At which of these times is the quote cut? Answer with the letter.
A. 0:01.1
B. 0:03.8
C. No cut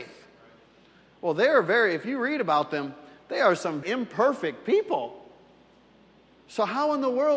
B